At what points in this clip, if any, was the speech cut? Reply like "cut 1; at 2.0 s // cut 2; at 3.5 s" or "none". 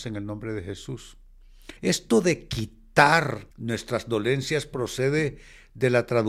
cut 1; at 1.8 s // cut 2; at 3.5 s